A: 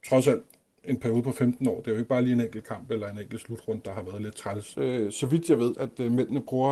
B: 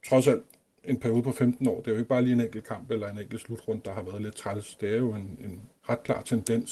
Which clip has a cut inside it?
A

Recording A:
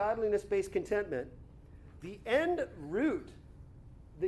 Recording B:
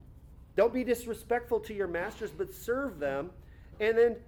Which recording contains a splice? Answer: A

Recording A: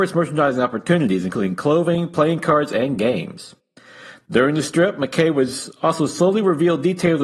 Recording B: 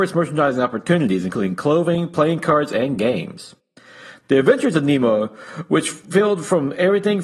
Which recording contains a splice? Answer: B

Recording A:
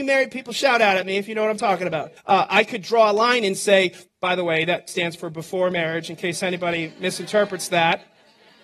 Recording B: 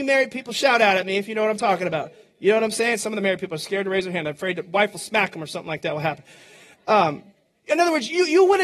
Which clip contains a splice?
A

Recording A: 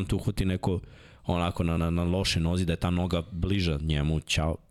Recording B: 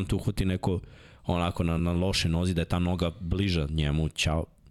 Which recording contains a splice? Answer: B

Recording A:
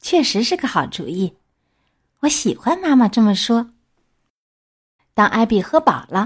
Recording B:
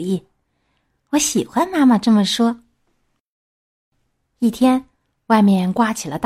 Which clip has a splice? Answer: A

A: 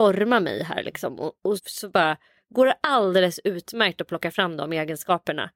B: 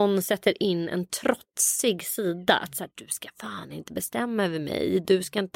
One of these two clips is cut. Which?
A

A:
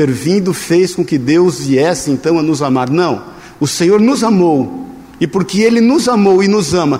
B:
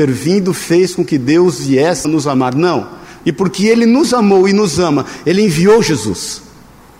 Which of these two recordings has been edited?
B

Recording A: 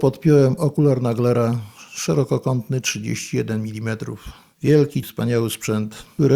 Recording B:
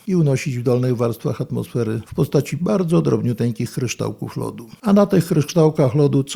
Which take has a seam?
A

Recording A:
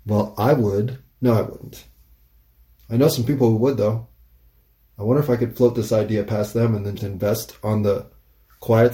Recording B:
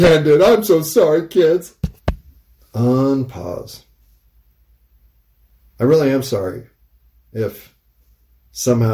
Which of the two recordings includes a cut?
A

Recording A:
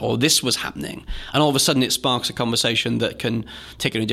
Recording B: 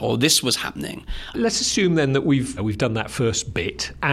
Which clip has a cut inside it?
B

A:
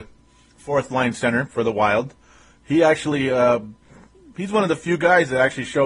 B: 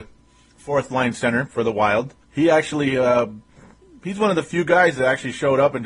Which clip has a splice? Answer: B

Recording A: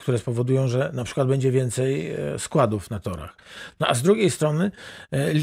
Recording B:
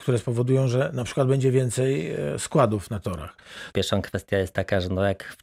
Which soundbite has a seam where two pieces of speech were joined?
B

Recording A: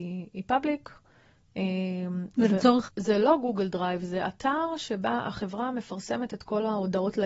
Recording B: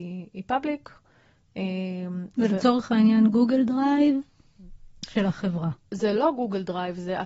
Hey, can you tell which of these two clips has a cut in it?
A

